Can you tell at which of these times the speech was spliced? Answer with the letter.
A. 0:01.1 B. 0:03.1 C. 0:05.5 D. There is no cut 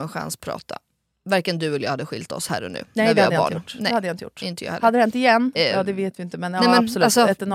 C